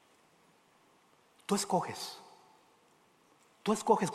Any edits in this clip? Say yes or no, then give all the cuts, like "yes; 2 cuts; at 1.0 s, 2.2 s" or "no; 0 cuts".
no; 0 cuts